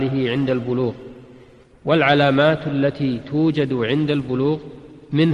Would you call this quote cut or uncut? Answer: uncut